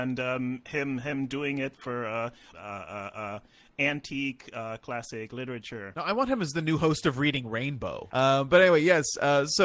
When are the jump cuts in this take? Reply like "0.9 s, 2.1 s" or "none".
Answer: 2.5 s, 8.1 s